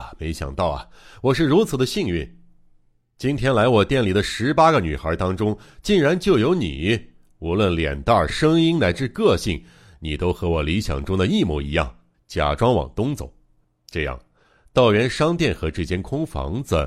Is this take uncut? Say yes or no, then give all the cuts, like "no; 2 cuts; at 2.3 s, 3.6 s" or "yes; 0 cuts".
no; 3 cuts; at 8.3 s, 12.1 s, 13.6 s